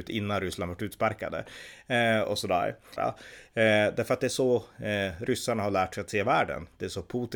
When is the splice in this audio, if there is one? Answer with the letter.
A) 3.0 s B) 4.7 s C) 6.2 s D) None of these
A